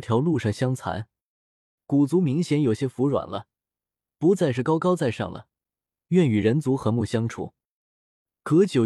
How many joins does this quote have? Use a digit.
1